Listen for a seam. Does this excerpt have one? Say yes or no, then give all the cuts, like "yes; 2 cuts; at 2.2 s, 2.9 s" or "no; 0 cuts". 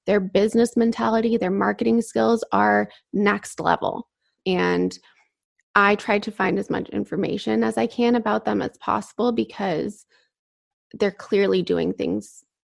yes; 1 cut; at 4.4 s